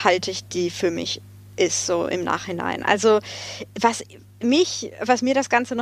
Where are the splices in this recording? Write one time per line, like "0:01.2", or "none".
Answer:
0:04.4